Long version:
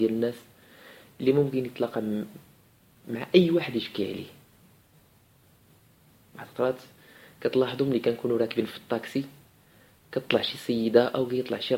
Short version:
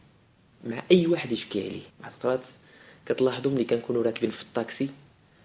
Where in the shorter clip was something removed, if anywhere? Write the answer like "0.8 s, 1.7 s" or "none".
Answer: 1.9 s